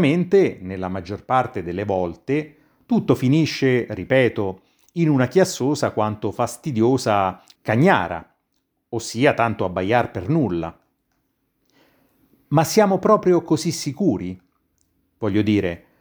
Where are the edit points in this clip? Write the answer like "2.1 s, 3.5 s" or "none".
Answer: 7.6 s